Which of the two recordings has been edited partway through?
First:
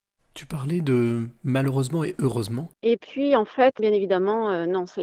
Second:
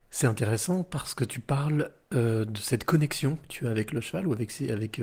first; 2 cuts; at 2.7 s, 3.8 s

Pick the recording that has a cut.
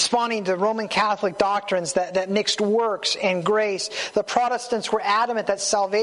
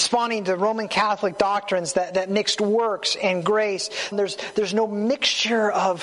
second; 1 cut; at 4.1 s

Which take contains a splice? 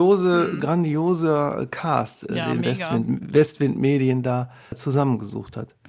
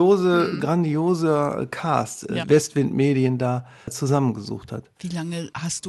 second; 2 cuts; at 2.4 s, 5.0 s

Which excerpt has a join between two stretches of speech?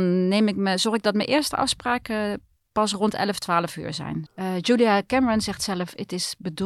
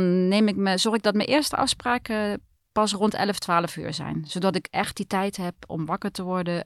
first; 1 cut; at 4.3 s

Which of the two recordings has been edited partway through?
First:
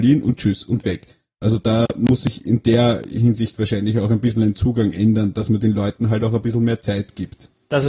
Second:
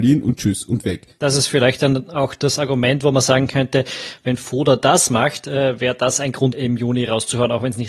second; 2 cuts; at 1.2 s, 6.5 s

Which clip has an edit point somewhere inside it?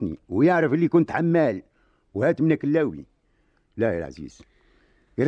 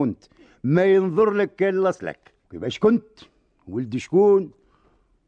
second; 1 cut; at 2.4 s

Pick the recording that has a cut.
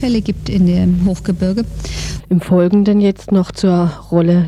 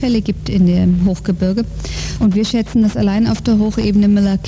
first; 1 cut; at 2.2 s

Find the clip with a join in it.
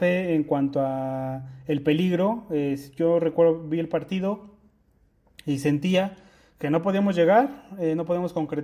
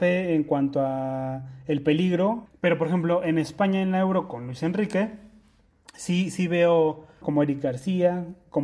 second; 2 cuts; at 2.5 s, 7.2 s

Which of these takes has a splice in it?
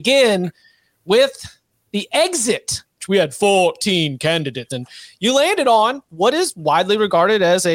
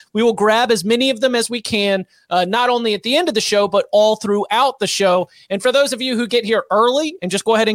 first; 2 cuts; at 3.0 s, 4.7 s

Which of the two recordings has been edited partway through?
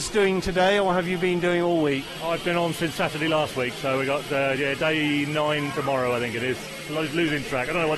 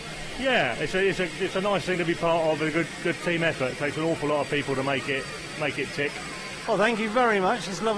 second; 1 cut; at 6.7 s

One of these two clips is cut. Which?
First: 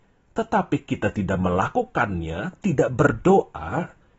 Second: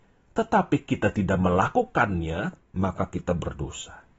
second; 1 cut; at 2.6 s

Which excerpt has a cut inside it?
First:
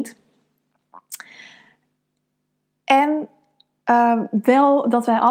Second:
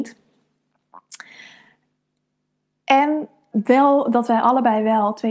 second; 1 cut; at 3.5 s

